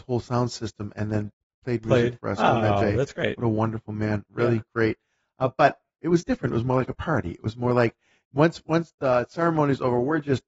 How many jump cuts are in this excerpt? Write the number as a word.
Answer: zero